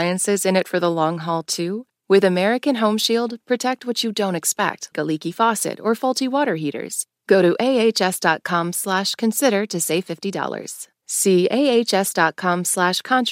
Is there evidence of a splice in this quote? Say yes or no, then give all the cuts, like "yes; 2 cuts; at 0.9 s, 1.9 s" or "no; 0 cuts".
yes; 1 cut; at 4.9 s